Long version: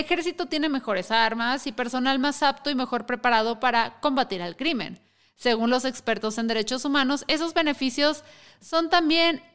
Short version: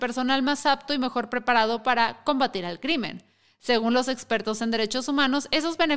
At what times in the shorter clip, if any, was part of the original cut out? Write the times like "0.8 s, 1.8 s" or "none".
none